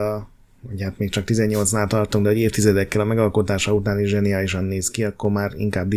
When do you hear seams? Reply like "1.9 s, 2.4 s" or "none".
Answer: none

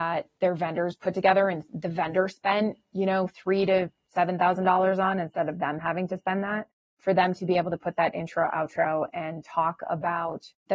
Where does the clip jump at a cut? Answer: none

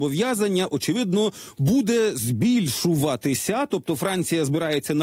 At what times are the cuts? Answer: none

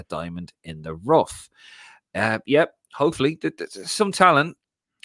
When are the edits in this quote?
none

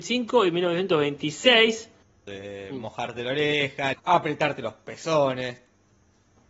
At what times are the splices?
2.3 s, 3.9 s

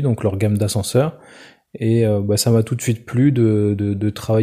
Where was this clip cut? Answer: none

